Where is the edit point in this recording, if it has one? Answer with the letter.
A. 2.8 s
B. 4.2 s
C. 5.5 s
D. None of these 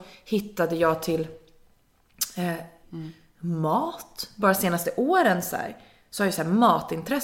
A